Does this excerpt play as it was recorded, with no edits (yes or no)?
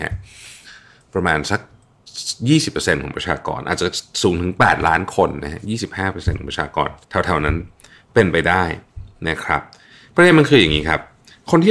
no